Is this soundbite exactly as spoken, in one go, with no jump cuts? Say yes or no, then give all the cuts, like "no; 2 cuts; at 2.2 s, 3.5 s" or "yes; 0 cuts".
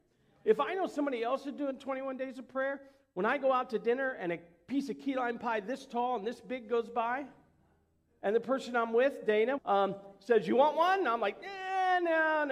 no; 1 cut; at 9.6 s